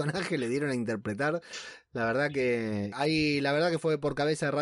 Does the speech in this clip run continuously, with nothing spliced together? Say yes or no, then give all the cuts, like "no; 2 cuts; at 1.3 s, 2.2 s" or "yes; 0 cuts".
no; 1 cut; at 2.9 s